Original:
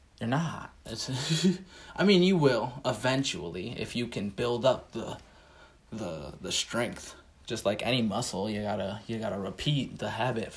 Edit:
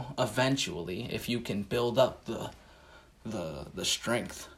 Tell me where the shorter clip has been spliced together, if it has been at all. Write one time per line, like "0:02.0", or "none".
none